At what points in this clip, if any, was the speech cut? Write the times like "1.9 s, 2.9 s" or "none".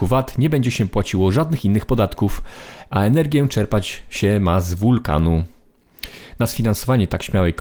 none

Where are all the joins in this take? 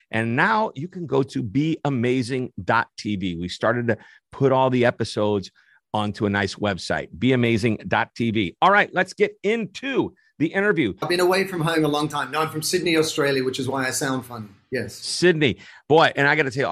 11.0 s

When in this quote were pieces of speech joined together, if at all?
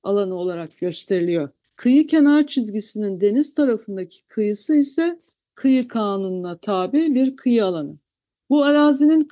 8.4 s

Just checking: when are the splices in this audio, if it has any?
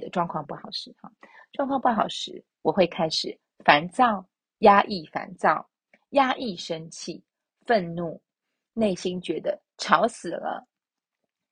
none

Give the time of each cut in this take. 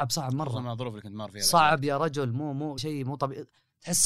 2.8 s

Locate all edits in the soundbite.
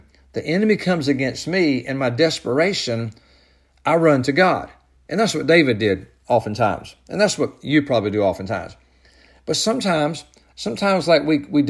none

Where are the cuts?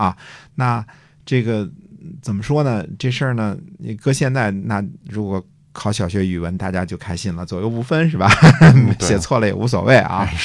none

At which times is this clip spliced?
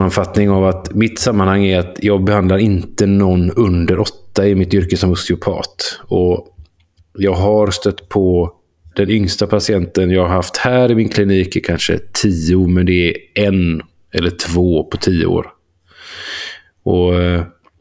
none

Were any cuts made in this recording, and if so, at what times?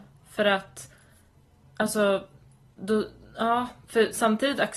none

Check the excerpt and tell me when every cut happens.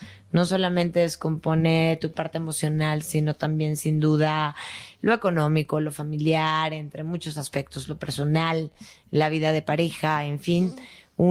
none

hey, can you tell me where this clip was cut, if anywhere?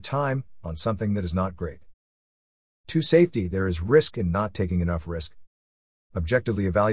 2.7 s

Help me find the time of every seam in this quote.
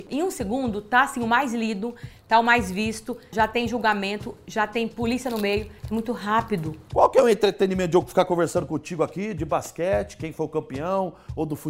3.3 s

